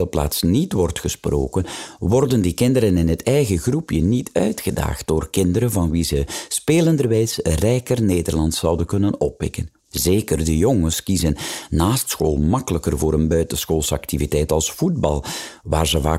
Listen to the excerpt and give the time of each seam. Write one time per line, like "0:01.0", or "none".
0:09.8